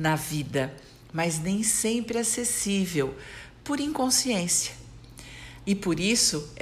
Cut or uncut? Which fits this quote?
cut